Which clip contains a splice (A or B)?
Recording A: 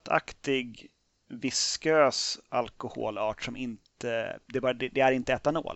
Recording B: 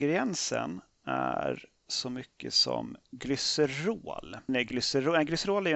B